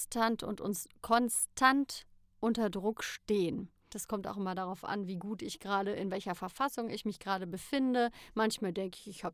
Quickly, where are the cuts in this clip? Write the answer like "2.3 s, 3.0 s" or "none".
3.9 s

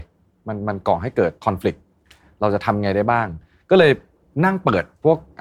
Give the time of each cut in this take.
1.4 s

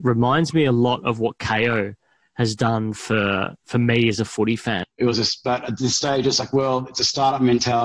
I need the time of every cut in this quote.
4.8 s

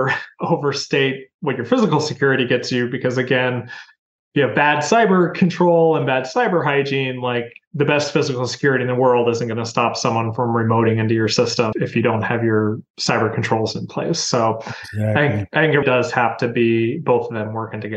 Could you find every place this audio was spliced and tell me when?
11.7 s, 15.8 s

